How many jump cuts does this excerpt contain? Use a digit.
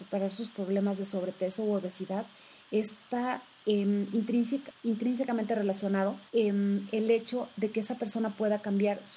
2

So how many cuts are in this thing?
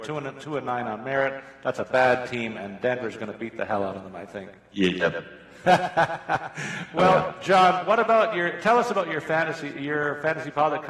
0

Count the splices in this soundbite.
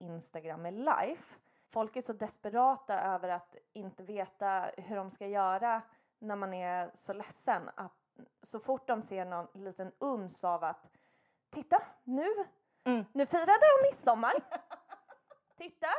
1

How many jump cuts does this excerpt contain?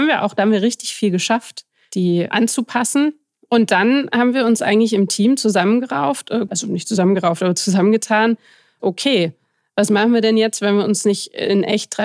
2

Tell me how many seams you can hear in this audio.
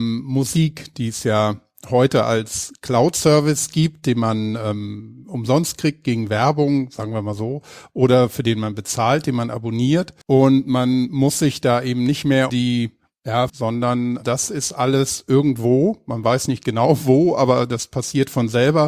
3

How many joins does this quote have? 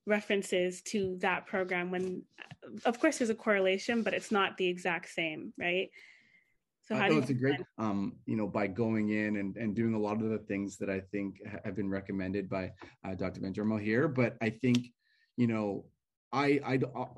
1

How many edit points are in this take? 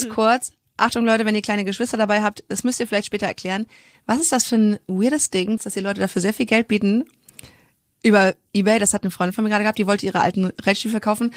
1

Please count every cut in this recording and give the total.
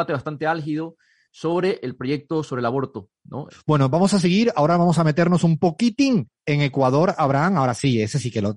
1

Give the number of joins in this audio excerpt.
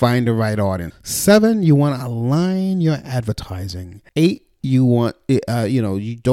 2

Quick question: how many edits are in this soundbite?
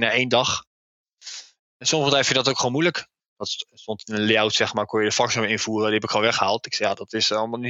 2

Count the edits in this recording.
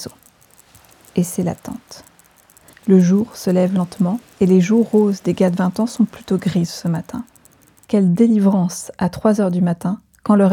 2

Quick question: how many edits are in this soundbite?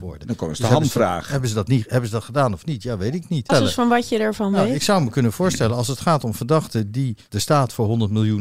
1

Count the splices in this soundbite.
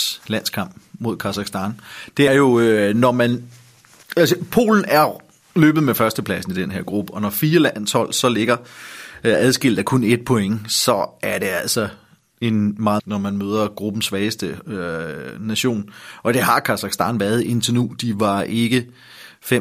2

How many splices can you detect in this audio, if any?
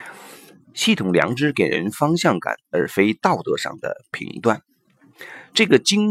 0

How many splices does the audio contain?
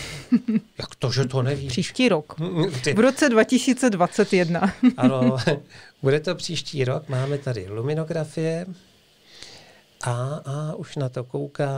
1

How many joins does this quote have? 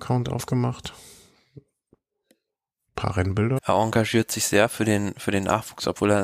1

